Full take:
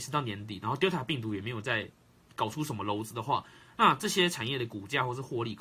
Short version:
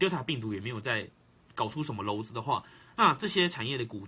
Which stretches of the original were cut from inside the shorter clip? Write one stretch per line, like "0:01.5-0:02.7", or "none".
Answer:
none